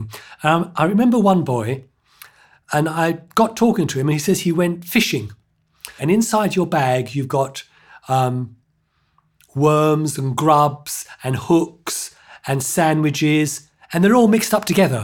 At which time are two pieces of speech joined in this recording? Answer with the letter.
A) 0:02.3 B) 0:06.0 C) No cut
B